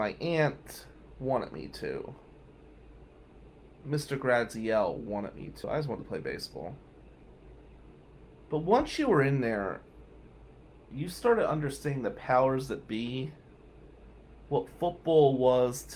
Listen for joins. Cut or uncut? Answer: uncut